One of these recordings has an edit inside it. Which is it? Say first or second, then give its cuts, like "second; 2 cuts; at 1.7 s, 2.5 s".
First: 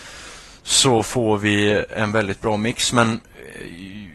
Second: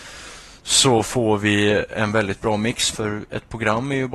second; 1 cut; at 2.9 s